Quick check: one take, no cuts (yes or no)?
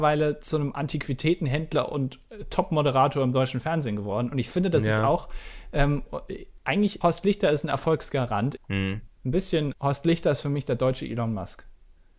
no